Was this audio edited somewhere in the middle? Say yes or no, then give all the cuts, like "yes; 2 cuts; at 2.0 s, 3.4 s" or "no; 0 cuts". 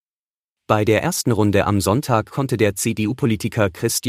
no; 0 cuts